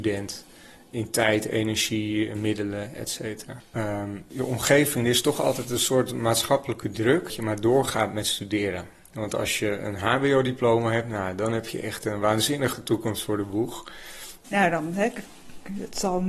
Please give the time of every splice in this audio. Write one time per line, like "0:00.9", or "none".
0:14.4